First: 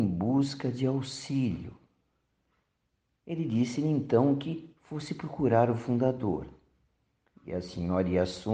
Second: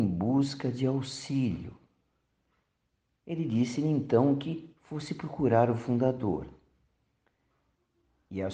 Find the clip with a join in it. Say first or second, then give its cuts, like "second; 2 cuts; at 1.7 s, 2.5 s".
first; 1 cut; at 7.3 s